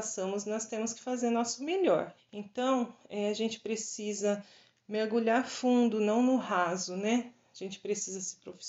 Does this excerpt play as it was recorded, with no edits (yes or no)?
no